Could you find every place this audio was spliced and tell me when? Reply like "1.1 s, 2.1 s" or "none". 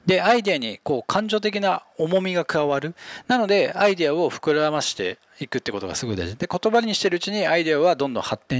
3.2 s